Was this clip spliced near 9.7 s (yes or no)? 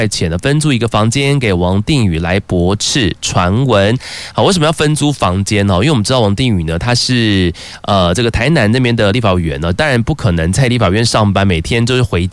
yes